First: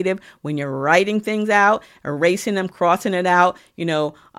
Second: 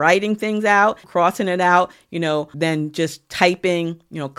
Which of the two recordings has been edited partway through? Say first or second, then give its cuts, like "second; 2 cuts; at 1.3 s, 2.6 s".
second; 2 cuts; at 1.0 s, 2.5 s